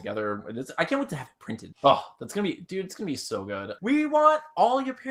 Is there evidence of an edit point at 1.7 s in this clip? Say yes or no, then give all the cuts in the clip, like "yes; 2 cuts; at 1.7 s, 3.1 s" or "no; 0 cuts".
yes; 2 cuts; at 1.7 s, 3.8 s